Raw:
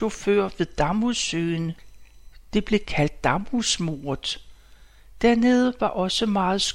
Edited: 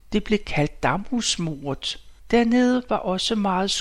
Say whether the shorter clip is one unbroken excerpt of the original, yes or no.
no